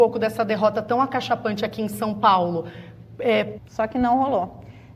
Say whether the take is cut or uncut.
cut